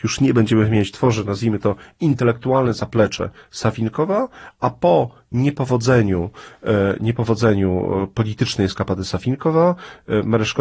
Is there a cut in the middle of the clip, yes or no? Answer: no